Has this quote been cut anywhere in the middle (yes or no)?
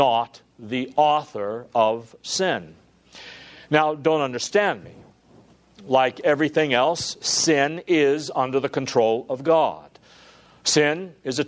no